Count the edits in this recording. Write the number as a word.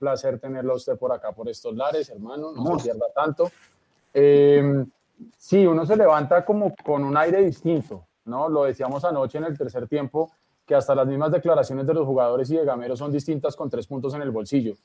one